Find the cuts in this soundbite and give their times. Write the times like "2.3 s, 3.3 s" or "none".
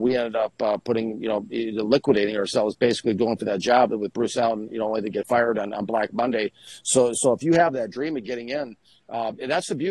none